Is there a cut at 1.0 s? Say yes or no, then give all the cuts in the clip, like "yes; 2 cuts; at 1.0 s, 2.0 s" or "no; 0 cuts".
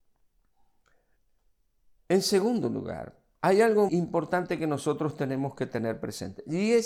no; 1 cut; at 3.9 s